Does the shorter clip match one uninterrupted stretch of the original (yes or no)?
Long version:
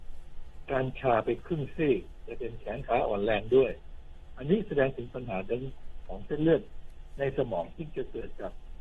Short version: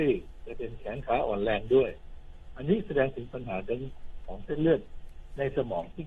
yes